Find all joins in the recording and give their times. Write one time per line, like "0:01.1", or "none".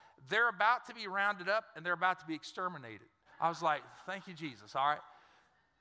0:03.3